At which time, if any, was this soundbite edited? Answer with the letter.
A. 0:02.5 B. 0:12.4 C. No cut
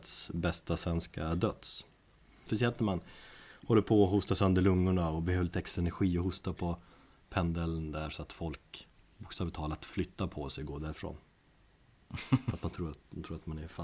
A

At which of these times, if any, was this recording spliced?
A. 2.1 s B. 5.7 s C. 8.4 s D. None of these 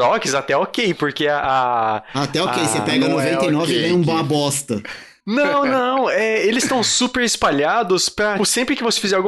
C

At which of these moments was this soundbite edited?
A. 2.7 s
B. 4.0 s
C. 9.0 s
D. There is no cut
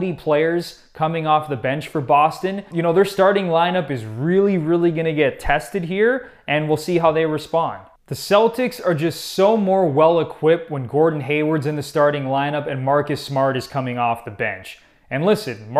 A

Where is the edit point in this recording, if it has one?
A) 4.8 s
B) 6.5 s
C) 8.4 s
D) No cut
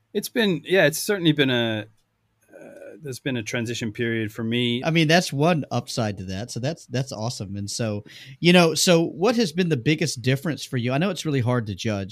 A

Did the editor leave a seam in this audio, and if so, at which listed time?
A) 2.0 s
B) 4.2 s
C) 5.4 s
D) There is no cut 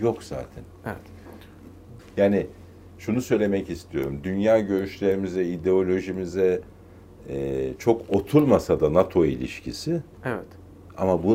A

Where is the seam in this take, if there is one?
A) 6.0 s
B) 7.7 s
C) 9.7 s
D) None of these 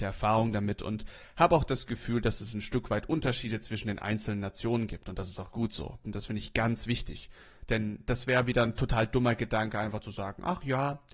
A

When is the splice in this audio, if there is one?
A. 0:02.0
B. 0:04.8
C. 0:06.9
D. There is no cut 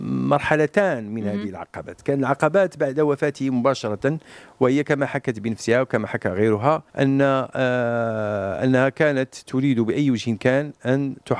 C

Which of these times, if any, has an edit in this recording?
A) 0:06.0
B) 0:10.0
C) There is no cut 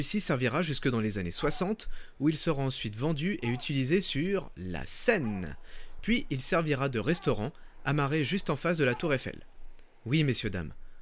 C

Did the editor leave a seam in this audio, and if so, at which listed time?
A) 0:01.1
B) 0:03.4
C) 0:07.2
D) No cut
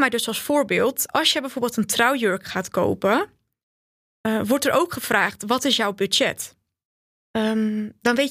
D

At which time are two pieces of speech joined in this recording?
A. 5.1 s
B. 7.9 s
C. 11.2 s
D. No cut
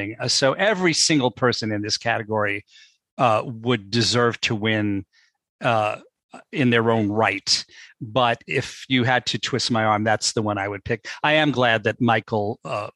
D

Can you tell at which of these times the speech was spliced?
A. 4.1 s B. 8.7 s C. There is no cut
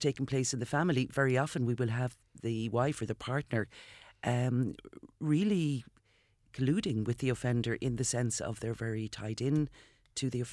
C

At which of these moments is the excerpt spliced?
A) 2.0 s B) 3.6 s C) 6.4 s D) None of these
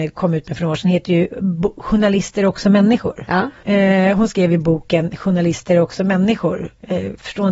B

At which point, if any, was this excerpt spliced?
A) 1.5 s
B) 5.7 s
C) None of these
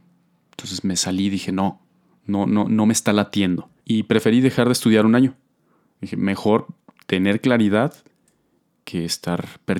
C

